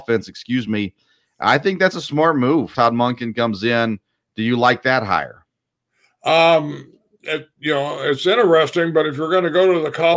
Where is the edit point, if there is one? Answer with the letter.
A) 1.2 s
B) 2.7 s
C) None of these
B